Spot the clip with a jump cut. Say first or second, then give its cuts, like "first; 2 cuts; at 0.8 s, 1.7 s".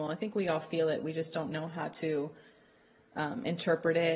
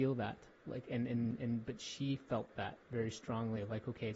first; 1 cut; at 1.5 s